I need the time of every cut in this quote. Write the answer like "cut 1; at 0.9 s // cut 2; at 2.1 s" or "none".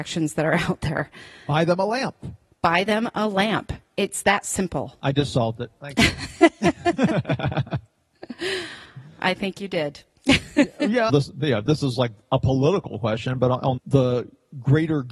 cut 1; at 11.1 s // cut 2; at 13.8 s